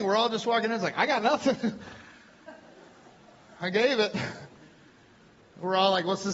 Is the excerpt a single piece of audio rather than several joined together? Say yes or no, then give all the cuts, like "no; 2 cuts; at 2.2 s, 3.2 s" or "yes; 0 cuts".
yes; 0 cuts